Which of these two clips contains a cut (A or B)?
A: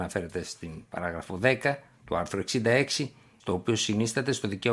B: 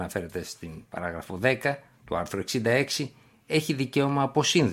A